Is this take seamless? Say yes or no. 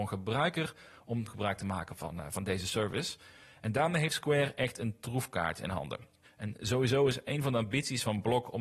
no